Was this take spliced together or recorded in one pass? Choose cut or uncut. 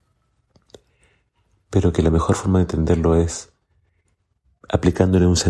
uncut